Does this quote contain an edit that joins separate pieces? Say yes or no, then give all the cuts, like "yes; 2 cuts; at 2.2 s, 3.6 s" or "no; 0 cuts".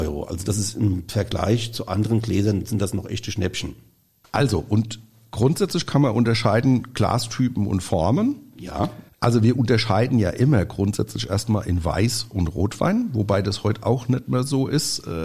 no; 0 cuts